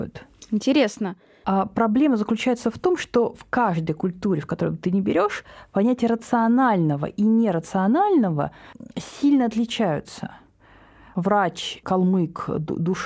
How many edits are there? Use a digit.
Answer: 1